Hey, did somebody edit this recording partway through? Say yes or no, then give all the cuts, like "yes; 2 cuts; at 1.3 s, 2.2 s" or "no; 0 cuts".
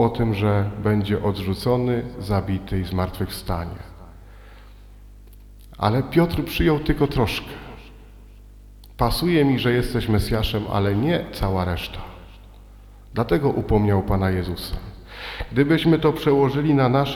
no; 0 cuts